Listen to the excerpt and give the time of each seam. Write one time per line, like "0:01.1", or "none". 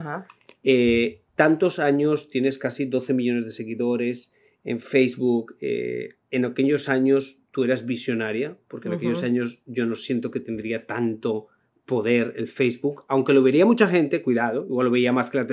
none